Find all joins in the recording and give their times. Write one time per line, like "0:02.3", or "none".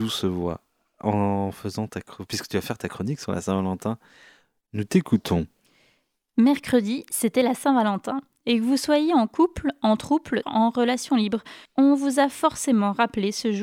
0:10.4
0:11.7

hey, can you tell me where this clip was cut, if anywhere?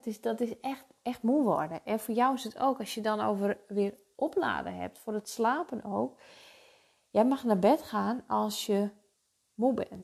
none

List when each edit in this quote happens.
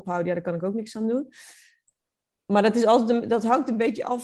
none

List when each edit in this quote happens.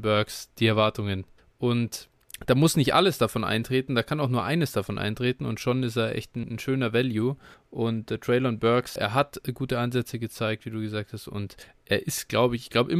0:09.0
0:11.8

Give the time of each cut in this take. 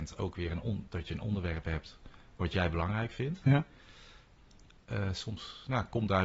none

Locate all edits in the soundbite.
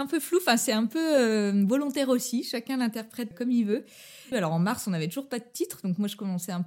0:03.3
0:04.3

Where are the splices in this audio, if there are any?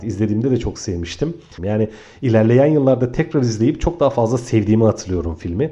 0:01.6

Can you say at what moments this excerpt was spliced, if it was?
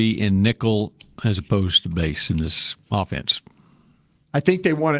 0:02.8

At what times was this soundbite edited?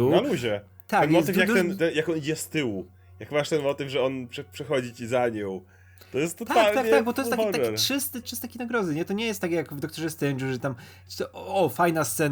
0:08.2

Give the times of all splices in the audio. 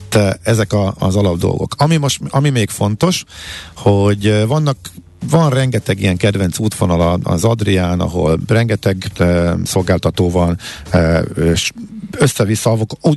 none

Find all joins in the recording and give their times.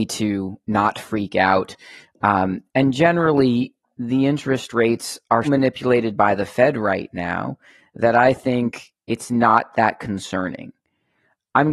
0:05.4
0:09.0

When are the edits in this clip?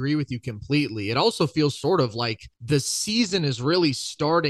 0:02.5

